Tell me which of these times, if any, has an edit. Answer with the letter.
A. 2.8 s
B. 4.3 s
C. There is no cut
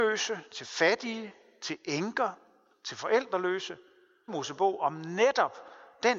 B